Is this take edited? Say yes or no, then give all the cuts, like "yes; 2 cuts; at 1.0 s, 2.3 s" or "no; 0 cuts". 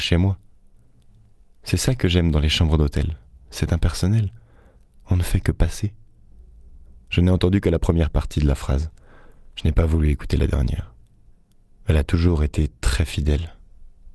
no; 0 cuts